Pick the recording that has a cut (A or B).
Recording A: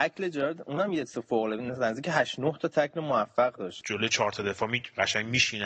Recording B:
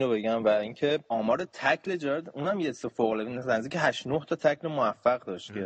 A